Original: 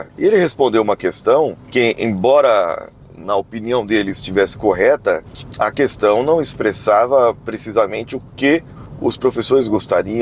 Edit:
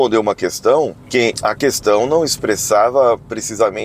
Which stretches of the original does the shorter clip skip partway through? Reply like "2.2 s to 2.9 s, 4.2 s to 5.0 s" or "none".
1.9 s to 5.5 s